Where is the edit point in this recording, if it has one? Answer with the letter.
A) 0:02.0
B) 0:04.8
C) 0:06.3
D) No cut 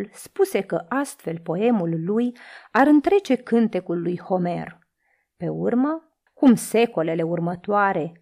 C